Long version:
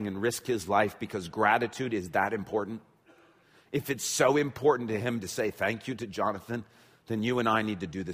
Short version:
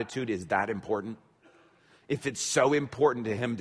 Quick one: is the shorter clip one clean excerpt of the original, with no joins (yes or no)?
yes